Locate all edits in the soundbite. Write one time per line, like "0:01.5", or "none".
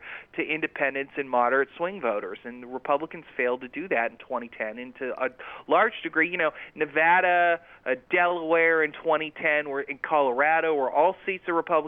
none